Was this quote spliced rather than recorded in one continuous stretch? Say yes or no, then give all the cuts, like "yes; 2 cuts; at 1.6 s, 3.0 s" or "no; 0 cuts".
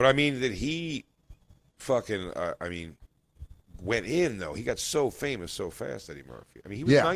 no; 0 cuts